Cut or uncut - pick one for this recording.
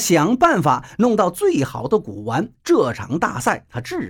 uncut